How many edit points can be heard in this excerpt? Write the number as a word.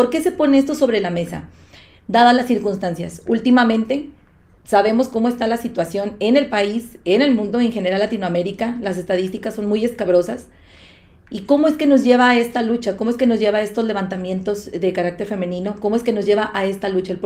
zero